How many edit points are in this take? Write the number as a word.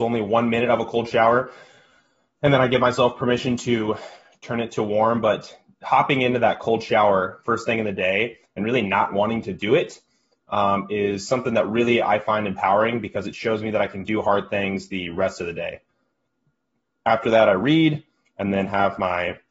zero